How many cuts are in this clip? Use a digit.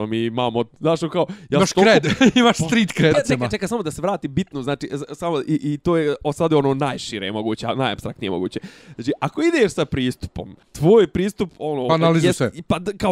2